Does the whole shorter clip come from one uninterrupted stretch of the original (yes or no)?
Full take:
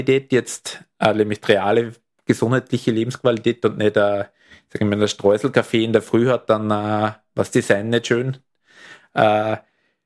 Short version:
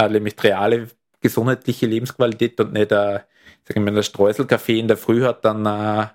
yes